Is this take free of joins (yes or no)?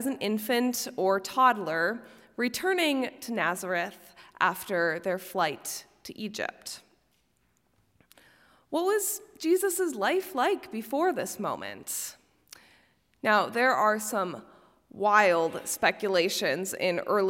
yes